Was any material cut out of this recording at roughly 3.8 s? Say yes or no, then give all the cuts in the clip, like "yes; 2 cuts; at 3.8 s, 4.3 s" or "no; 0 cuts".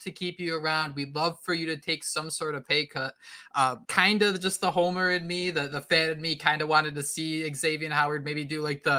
yes; 1 cut; at 3.8 s